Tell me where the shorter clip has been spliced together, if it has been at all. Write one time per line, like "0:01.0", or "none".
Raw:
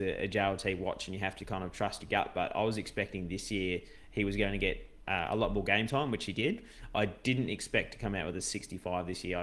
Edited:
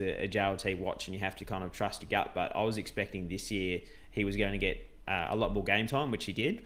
none